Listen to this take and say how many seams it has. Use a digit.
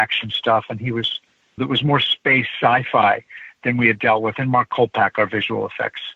1